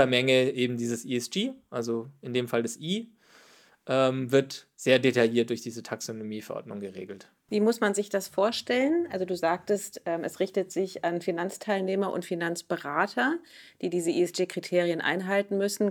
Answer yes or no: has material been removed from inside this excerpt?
no